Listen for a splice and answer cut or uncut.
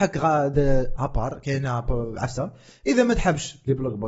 cut